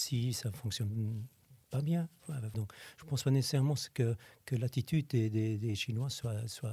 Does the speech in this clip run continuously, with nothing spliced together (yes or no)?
no